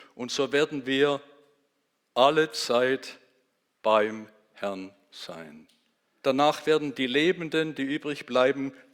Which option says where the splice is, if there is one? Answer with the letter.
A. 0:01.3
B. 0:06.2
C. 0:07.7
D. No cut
B